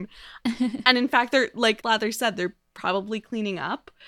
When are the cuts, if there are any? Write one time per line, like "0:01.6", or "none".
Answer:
0:01.8

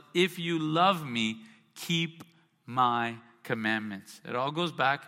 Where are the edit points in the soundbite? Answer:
none

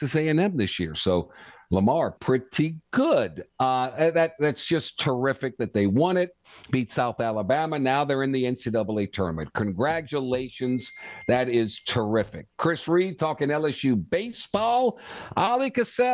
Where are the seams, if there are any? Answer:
0:02.2
0:03.5

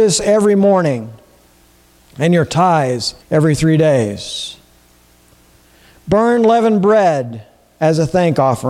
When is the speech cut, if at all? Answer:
0:03.2

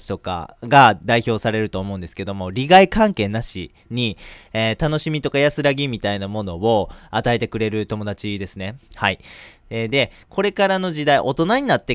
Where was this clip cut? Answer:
0:08.9

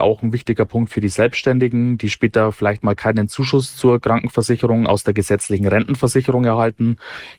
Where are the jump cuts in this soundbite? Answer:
none

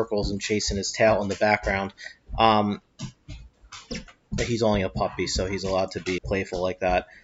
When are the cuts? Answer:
0:06.2

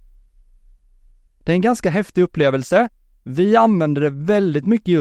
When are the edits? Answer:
0:01.3

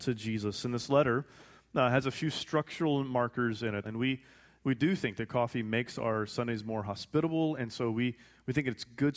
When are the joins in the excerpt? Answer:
0:03.8

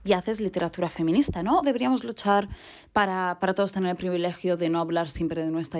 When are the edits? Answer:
0:01.6

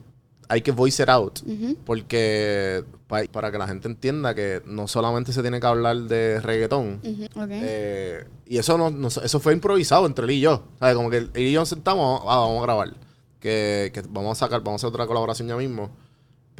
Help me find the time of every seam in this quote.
0:03.3
0:07.3

